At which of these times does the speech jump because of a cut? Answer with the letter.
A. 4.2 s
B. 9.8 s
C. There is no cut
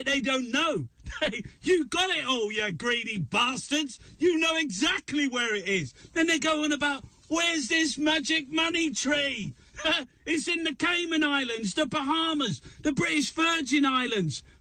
C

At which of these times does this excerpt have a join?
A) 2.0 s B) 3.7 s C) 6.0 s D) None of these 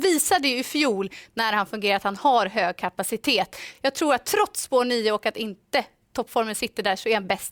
D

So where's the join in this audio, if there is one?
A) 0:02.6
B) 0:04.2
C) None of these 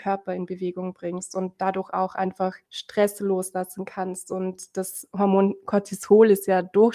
A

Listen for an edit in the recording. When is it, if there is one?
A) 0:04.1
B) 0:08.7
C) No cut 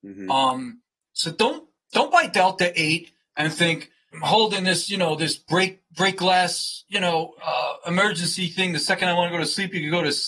A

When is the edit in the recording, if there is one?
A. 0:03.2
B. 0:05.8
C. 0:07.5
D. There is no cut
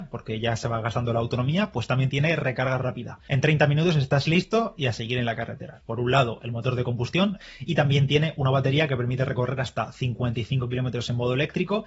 B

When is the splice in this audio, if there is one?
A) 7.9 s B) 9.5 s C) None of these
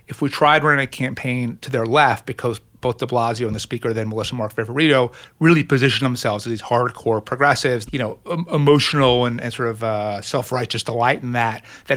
A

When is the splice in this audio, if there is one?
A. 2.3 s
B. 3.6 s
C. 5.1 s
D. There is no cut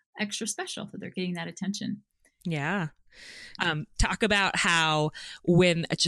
B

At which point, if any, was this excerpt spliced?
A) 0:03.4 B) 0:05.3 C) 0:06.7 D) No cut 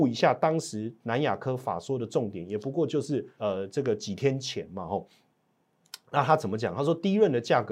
A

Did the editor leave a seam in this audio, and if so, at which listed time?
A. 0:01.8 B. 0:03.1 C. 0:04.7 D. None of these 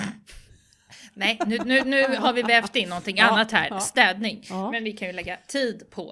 D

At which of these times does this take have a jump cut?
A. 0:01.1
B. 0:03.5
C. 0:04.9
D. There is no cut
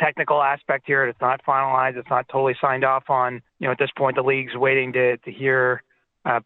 B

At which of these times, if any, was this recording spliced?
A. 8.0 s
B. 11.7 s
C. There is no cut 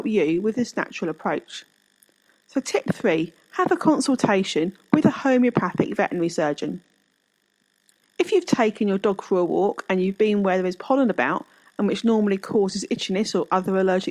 A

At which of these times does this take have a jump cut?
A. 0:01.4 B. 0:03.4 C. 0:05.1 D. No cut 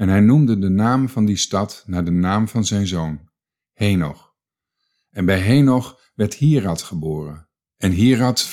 D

